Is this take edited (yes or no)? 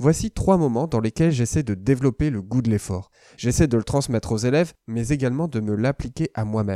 no